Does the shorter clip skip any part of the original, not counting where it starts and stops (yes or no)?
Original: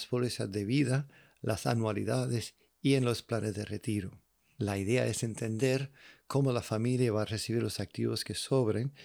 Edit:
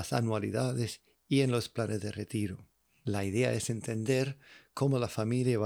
no